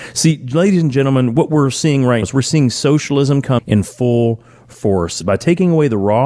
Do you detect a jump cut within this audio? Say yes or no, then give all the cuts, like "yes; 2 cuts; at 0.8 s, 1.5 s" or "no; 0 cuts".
yes; 3 cuts; at 2.2 s, 3.6 s, 5.2 s